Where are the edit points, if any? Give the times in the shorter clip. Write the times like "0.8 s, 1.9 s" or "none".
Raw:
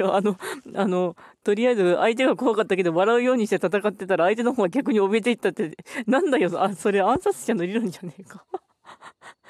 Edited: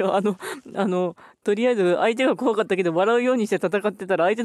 none